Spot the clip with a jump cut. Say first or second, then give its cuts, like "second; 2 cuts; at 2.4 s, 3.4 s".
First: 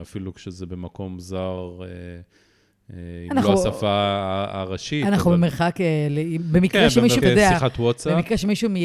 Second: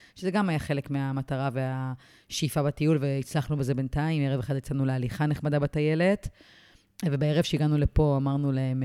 first; 1 cut; at 7.2 s